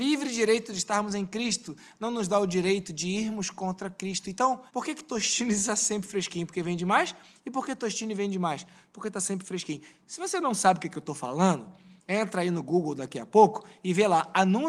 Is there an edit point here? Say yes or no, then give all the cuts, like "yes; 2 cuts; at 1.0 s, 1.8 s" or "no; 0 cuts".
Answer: yes; 1 cut; at 4.7 s